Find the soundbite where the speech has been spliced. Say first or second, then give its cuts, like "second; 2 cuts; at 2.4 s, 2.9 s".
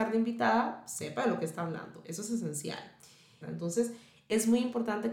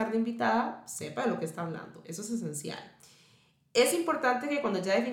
first; 1 cut; at 3.4 s